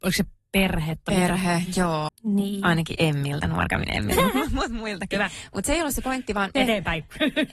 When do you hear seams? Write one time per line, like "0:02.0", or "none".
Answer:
0:02.1
0:06.5